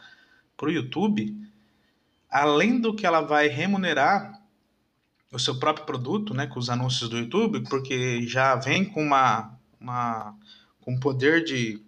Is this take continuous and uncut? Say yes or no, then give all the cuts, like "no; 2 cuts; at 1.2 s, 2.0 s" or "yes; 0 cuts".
no; 1 cut; at 7.6 s